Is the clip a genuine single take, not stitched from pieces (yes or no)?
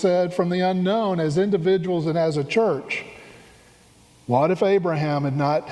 yes